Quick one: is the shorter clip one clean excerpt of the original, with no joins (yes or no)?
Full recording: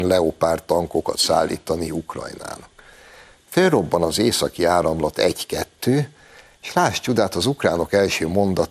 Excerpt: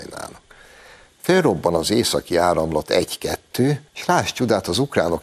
no